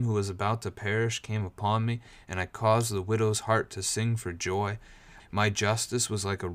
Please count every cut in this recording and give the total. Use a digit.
1